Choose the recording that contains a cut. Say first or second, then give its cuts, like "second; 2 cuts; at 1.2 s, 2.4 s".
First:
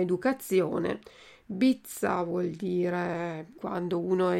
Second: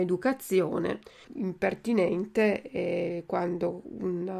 second; 1 cut; at 1.2 s